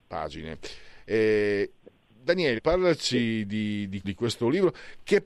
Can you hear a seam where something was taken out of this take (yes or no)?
yes